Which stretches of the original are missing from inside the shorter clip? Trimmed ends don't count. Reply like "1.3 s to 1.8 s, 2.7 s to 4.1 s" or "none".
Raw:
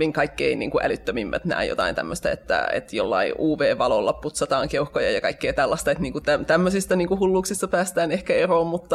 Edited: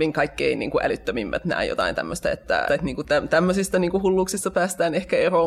2.7 s to 5.8 s